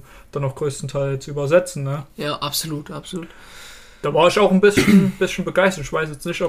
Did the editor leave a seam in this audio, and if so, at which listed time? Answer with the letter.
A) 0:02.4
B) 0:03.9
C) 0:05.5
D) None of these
D